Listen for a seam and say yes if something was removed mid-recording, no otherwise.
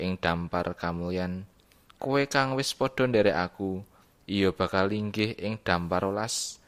no